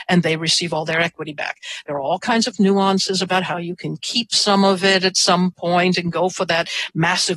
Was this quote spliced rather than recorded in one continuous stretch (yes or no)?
no